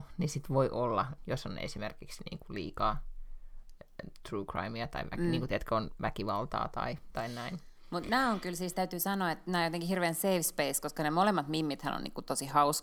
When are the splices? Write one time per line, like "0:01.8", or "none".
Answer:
0:01.2